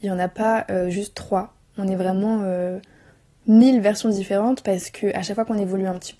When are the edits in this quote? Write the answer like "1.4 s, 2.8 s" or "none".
none